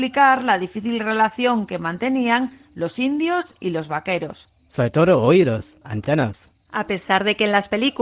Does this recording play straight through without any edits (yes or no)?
no